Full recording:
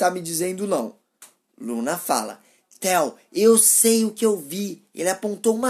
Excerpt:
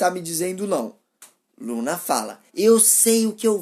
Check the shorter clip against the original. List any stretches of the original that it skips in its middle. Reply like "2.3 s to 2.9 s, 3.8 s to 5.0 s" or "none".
2.5 s to 3.3 s